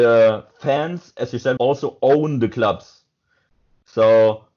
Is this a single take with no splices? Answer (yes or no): no